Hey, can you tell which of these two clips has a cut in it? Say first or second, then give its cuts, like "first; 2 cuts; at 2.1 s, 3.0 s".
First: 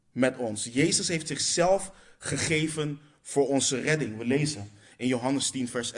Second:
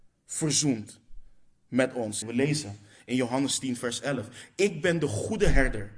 second; 1 cut; at 2.2 s